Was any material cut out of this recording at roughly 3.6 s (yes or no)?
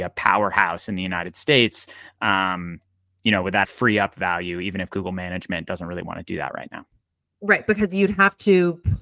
yes